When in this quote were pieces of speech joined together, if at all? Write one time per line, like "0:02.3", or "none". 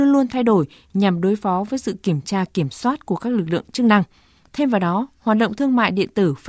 none